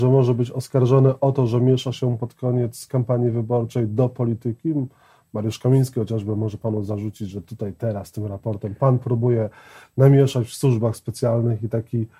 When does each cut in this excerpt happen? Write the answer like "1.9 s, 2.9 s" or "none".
none